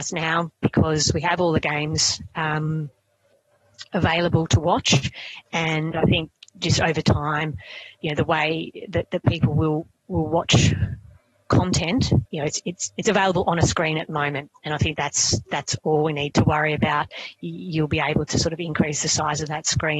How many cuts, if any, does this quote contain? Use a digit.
2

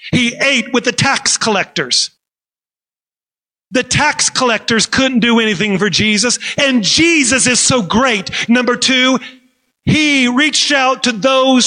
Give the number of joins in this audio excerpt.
2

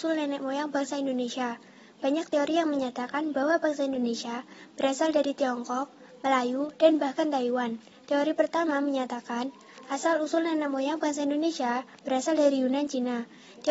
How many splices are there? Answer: 1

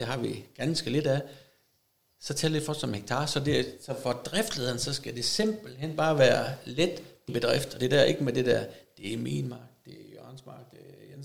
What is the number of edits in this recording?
1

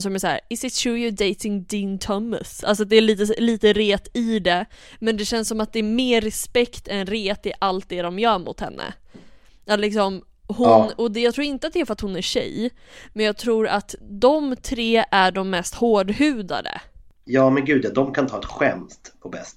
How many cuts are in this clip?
0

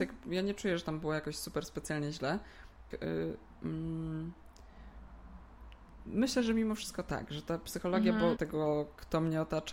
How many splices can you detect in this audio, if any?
2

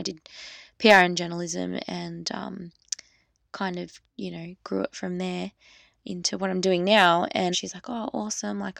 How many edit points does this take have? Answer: 2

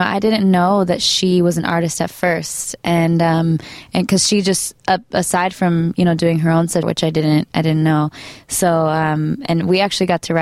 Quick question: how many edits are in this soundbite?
1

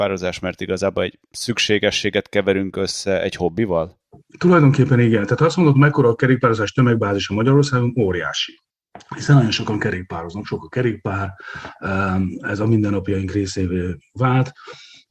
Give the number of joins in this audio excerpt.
0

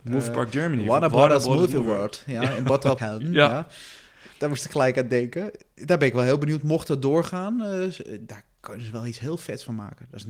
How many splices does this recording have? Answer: 1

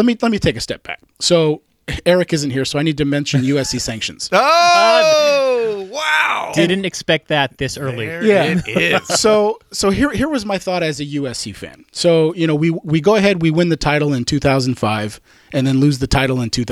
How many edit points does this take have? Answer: 0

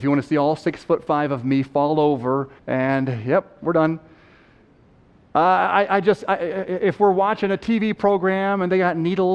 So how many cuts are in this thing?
1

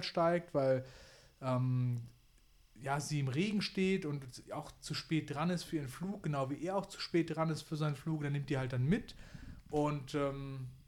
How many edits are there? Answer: 0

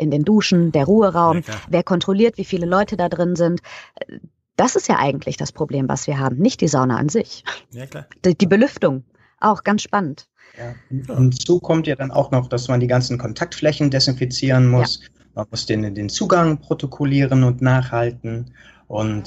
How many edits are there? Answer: 0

